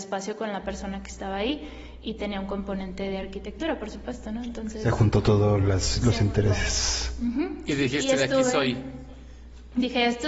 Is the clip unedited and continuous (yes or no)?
yes